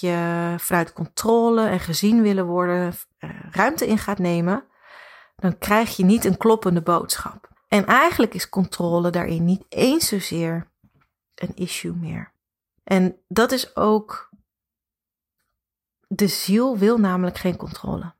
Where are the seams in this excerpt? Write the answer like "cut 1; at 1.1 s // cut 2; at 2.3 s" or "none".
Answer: cut 1; at 7.5 s